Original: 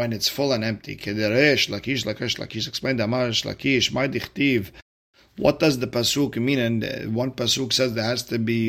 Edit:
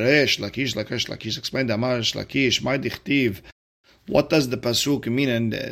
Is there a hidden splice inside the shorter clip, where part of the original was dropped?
no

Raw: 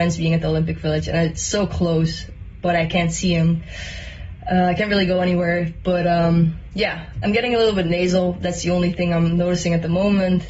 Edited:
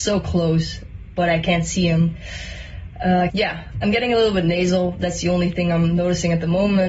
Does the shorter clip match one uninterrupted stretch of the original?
no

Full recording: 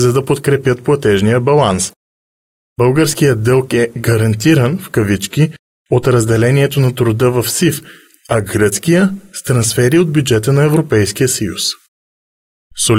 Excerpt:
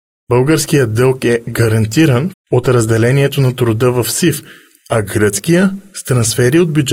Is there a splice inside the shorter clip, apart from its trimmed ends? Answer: yes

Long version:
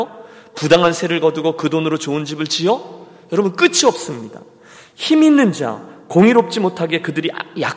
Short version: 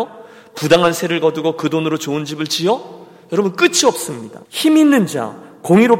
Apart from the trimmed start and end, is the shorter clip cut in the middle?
yes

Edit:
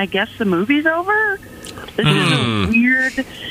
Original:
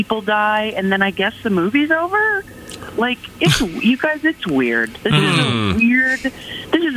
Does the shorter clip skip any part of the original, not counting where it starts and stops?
yes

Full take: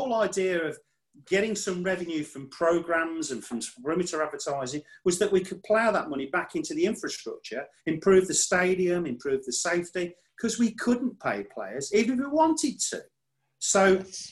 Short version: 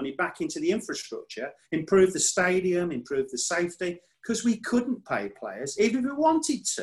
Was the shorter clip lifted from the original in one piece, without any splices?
yes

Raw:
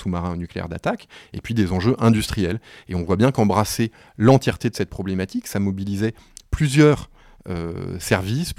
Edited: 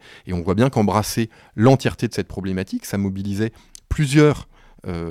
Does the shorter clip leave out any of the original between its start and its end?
no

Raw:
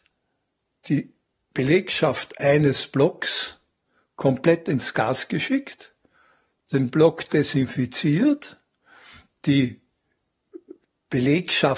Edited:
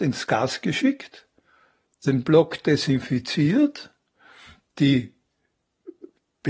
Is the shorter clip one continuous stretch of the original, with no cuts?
yes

